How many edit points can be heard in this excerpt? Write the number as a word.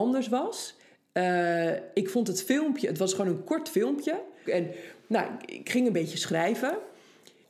one